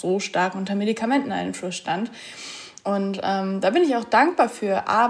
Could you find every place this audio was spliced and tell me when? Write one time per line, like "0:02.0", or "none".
none